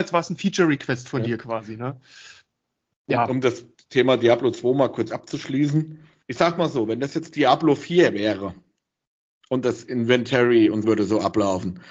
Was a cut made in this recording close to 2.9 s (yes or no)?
no